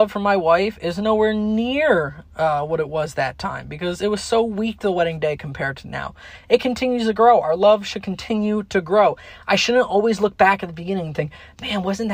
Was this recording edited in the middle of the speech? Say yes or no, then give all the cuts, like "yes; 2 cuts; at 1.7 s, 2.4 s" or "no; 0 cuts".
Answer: no; 0 cuts